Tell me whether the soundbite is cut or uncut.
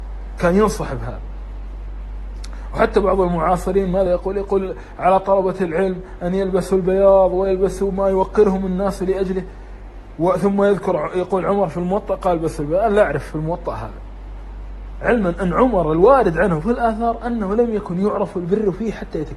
uncut